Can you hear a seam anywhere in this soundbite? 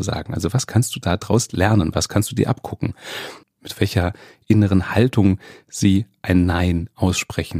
yes; 1 cut; at 3.4 s

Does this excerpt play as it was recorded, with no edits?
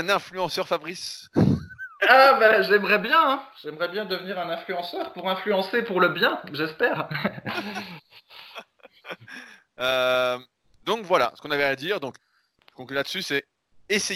yes; 0 cuts

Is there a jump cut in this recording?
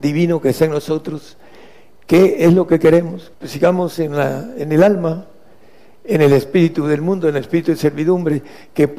yes; 1 cut; at 3.3 s

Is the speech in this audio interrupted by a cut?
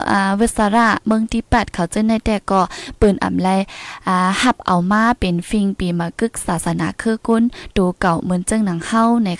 no; 0 cuts

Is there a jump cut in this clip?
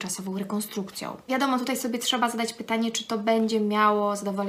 yes; 1 cut; at 1.3 s

